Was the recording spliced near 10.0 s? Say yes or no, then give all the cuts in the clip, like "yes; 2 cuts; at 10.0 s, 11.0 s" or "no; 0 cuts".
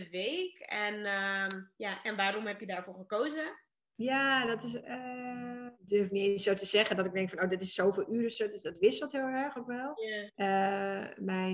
no; 1 cut; at 5.7 s